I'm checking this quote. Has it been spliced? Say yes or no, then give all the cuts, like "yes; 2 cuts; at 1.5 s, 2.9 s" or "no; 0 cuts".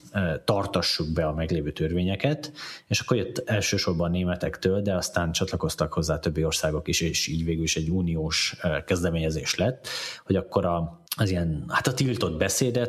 yes; 1 cut; at 11.1 s